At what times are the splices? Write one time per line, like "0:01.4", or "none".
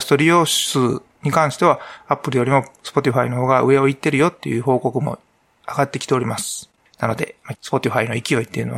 0:07.5

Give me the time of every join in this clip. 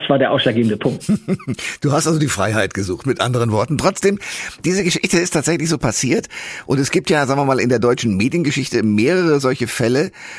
none

